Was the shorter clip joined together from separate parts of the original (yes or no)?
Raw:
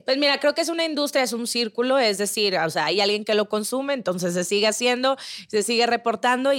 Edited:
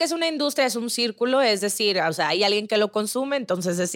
no